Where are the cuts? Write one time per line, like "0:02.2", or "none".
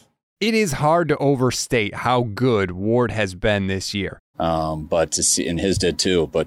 0:04.3